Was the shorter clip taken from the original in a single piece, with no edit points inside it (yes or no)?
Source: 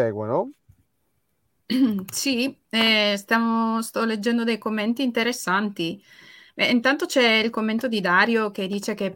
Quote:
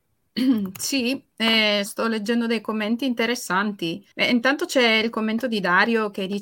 no